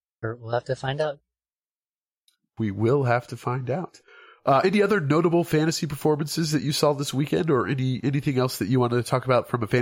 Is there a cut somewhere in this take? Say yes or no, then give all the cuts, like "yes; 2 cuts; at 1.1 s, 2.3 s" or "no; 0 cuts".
no; 0 cuts